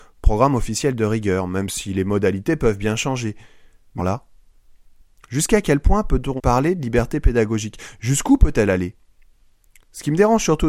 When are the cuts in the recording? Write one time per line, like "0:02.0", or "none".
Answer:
0:04.0
0:06.4